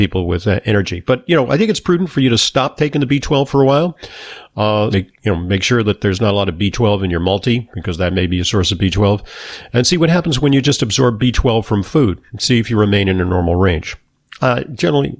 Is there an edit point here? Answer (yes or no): yes